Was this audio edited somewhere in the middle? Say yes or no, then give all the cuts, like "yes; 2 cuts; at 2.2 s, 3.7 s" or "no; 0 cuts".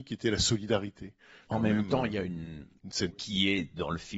yes; 2 cuts; at 1.5 s, 3.1 s